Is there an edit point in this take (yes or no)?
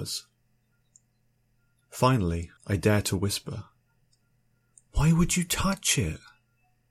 yes